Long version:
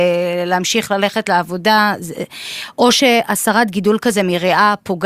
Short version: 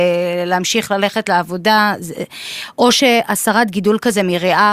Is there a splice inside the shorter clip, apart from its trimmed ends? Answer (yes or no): no